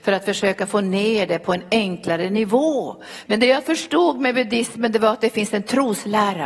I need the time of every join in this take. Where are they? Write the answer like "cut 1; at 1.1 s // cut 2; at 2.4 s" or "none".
cut 1; at 3.3 s